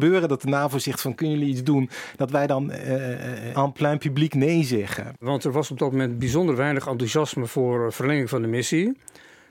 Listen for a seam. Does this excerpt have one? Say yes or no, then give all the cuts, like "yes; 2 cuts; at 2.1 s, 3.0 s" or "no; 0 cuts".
yes; 2 cuts; at 3.5 s, 5.1 s